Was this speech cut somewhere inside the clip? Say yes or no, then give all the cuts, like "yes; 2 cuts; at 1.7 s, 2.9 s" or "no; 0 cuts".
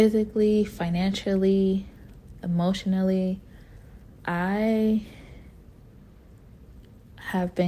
no; 0 cuts